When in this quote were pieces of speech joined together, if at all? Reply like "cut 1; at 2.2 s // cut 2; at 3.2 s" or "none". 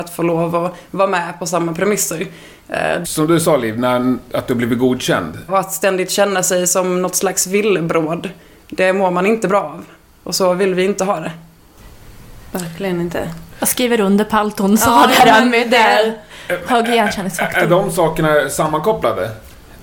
cut 1; at 3.0 s // cut 2; at 5.5 s